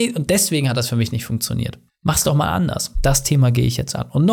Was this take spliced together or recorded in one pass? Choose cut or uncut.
cut